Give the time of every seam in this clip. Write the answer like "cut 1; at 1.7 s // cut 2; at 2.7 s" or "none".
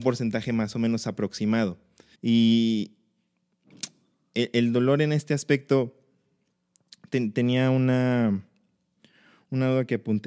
cut 1; at 2.1 s